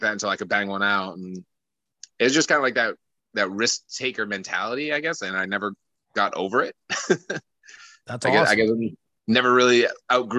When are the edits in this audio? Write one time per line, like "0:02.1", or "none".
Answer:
none